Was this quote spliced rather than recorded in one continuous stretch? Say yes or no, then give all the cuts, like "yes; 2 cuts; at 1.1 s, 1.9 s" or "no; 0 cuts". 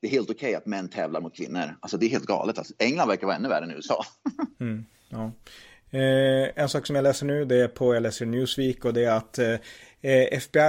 no; 0 cuts